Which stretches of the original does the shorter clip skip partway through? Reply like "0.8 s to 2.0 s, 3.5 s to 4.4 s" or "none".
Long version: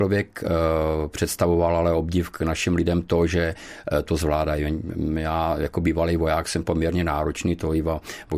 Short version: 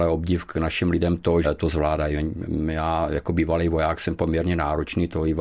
3.3 s to 3.9 s